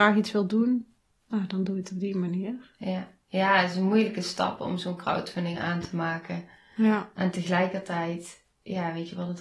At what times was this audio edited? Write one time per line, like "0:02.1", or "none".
none